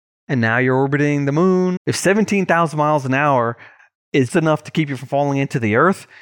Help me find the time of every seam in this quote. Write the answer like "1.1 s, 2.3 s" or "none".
1.8 s, 4.3 s